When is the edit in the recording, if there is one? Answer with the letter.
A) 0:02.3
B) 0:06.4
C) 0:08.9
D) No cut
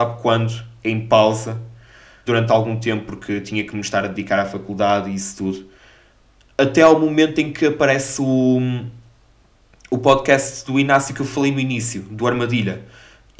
A